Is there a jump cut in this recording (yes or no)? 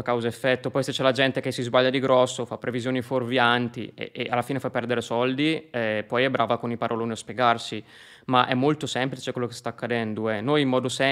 no